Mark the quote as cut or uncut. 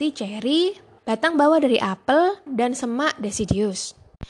cut